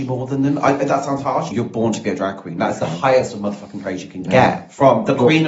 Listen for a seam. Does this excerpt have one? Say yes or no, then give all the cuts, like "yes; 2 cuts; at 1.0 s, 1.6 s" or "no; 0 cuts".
yes; 1 cut; at 1.5 s